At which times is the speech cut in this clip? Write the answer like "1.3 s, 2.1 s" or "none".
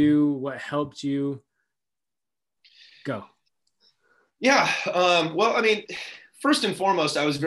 none